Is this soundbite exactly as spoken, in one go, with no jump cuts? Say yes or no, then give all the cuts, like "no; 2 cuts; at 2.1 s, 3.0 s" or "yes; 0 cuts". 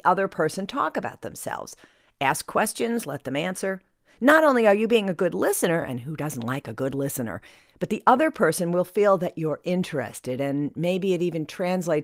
yes; 0 cuts